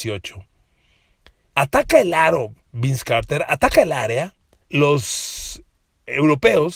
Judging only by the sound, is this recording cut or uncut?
cut